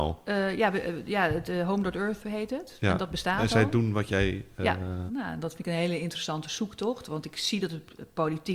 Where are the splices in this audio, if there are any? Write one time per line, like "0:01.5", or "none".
0:05.1